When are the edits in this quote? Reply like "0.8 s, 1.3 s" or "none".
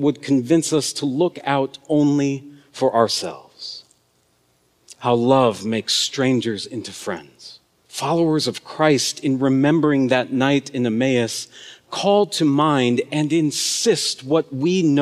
7.8 s